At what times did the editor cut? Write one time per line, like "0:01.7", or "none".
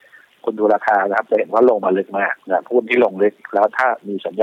0:02.4